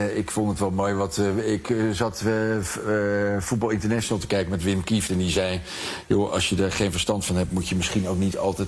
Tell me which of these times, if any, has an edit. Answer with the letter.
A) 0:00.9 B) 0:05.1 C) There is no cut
C